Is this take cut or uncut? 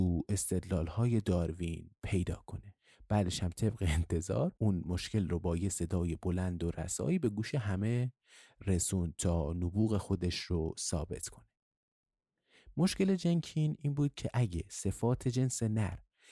cut